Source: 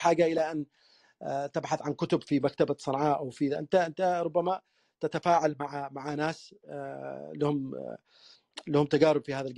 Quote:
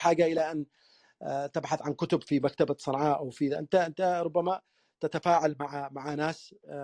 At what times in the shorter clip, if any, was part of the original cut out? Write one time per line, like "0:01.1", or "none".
none

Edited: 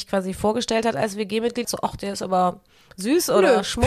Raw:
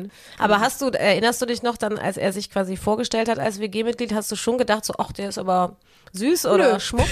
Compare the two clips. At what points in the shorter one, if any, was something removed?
0:01.6

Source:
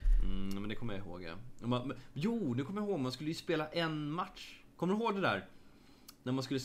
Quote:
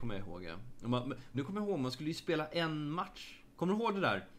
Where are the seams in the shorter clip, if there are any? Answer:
0:01.3

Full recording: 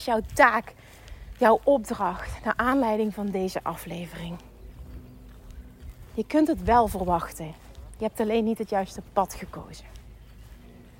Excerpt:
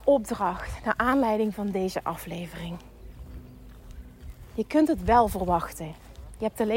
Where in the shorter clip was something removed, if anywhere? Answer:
none

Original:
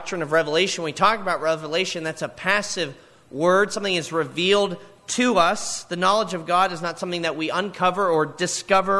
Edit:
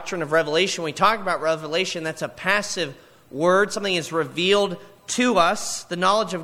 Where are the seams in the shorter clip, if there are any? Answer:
none

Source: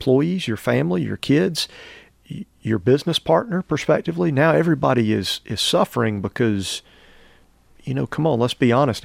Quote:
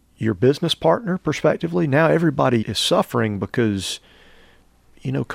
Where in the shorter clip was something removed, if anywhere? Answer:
0:02.6

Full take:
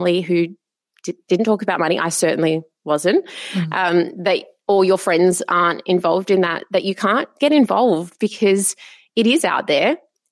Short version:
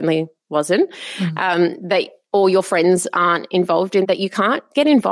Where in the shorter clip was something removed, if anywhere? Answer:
0:04.0

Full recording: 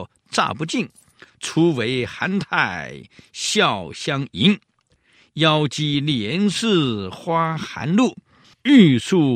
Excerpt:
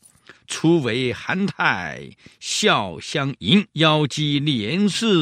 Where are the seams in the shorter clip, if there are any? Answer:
0:03.7

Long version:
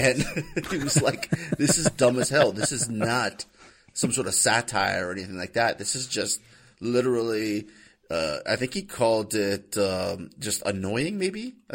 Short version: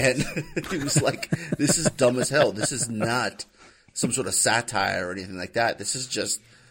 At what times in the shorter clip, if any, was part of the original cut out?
none

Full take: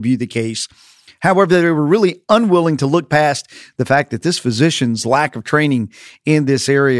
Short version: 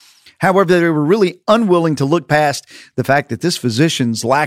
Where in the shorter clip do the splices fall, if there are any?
none

